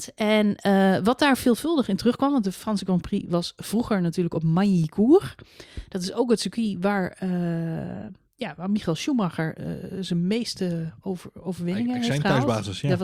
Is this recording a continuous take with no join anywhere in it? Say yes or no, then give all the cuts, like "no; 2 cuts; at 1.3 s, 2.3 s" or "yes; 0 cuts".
yes; 0 cuts